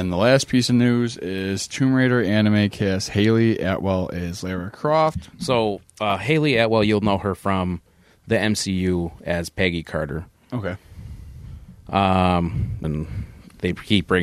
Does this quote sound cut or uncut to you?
cut